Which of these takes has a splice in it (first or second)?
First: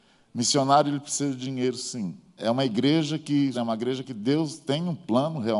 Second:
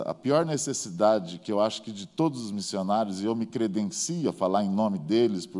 first